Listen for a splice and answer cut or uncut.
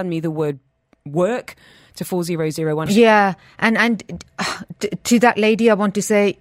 cut